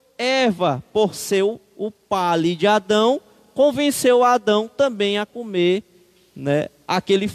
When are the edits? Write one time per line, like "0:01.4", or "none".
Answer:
none